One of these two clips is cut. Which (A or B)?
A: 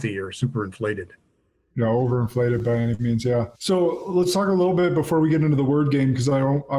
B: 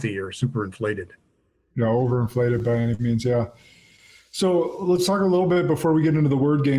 A